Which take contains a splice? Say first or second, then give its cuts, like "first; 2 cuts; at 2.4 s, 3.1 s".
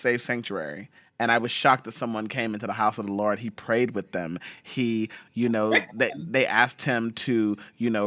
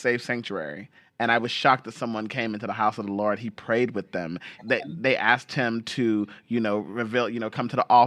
second; 1 cut; at 4.6 s